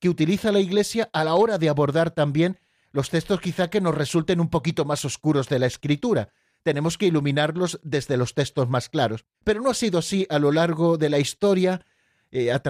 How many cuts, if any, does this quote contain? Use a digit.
1